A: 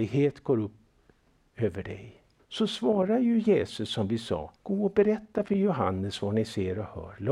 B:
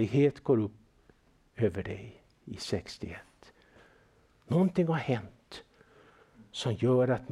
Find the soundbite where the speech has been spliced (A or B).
A